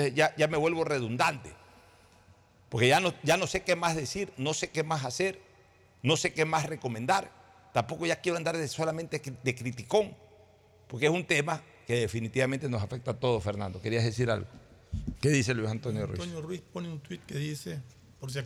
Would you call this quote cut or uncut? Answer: cut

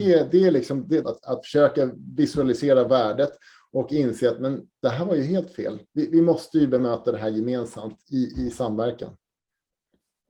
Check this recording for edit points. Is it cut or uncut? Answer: cut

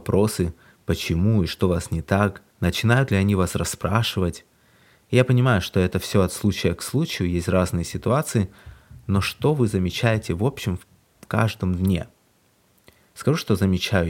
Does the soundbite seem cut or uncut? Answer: cut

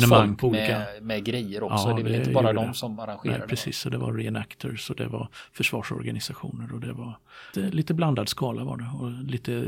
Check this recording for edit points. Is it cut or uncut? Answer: cut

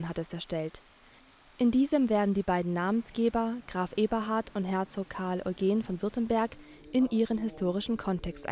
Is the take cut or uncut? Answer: uncut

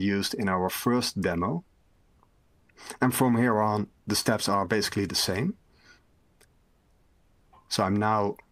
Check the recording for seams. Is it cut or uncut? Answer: uncut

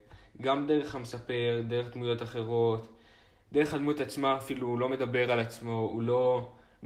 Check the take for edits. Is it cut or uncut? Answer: uncut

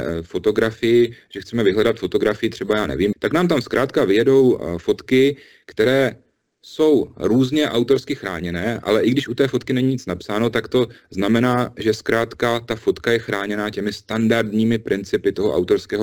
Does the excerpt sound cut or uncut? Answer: cut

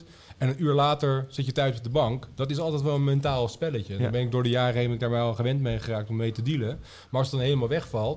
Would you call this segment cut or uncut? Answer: uncut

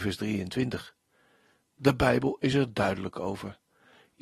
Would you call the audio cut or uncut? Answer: uncut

